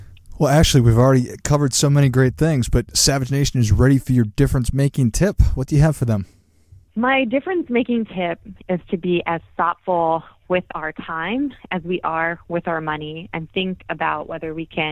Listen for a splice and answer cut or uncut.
uncut